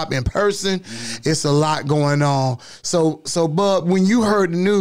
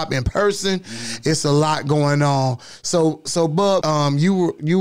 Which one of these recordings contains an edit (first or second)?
second